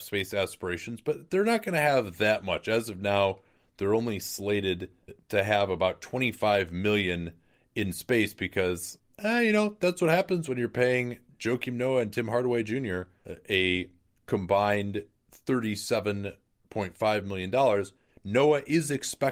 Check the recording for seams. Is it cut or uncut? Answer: uncut